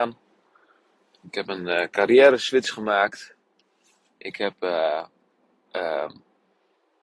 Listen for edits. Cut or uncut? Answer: uncut